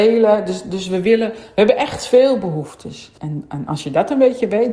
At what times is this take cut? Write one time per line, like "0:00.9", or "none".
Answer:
0:03.2

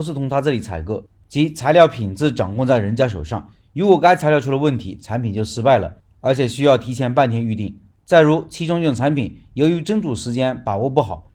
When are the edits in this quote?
0:07.9

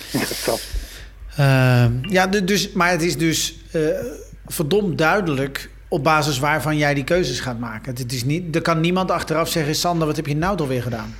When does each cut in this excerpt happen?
0:05.8

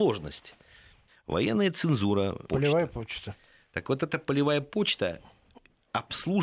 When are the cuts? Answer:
0:01.1
0:02.5

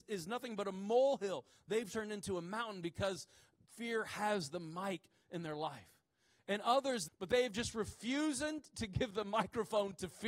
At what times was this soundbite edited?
0:07.1

